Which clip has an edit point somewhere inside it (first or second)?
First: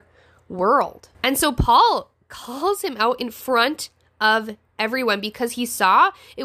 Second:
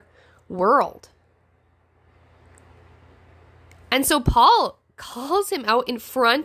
first